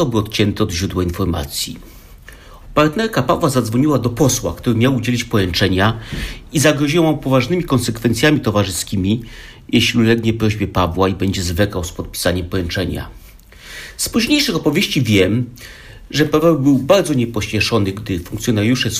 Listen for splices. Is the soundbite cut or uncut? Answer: cut